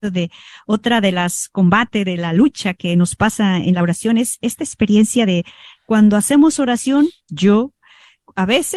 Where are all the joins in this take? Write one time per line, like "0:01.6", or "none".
0:07.3